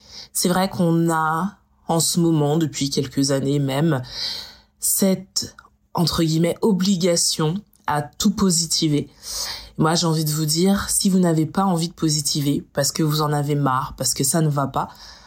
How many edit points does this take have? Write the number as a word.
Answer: zero